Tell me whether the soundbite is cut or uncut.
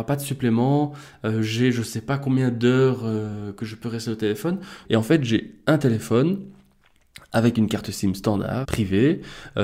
cut